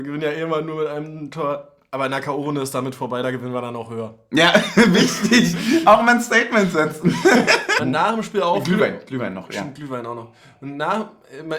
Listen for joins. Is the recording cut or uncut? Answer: cut